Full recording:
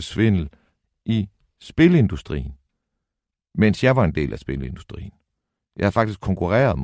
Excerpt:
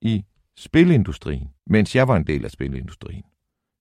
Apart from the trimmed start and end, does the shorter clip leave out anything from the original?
yes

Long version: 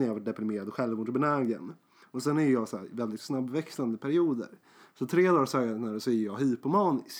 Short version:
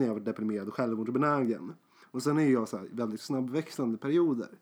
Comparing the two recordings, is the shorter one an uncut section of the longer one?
yes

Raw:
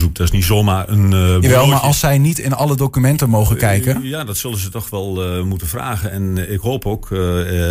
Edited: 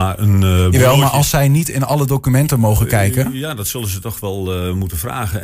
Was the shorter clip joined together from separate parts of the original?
no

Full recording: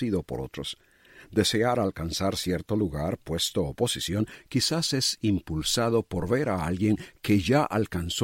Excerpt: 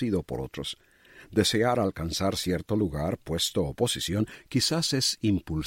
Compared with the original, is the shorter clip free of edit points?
yes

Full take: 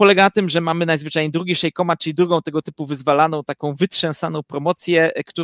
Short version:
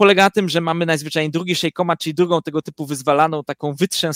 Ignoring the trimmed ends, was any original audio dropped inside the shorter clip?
no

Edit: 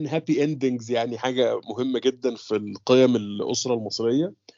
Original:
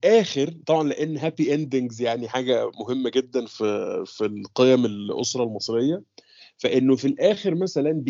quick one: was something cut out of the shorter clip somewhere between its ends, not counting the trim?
yes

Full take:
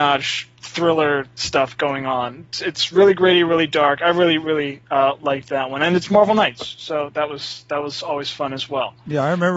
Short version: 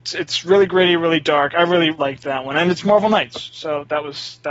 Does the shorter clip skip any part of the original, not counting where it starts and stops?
yes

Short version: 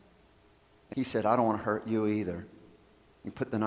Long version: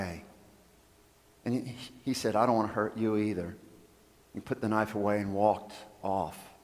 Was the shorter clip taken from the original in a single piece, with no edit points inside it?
no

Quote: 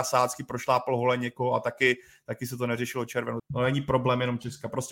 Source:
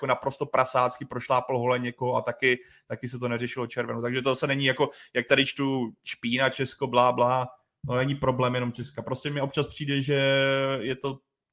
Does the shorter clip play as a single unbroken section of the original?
no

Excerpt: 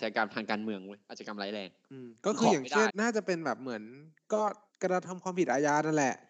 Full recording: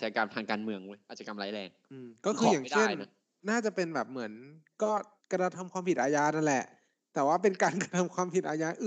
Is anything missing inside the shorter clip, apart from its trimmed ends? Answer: yes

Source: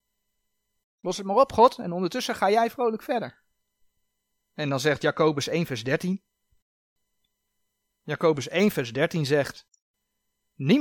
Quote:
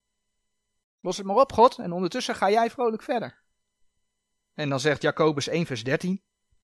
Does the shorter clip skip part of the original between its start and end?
no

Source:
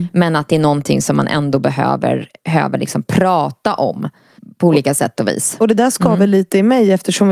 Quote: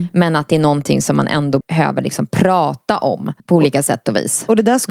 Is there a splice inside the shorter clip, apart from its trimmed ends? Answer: yes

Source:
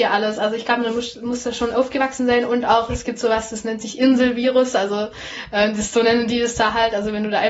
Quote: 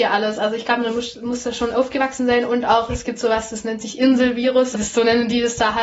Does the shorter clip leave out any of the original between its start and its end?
yes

